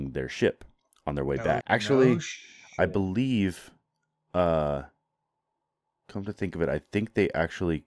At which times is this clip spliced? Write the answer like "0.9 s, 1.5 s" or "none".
1.6 s